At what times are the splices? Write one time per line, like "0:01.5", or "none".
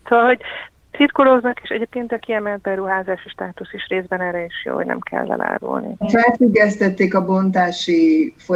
0:06.0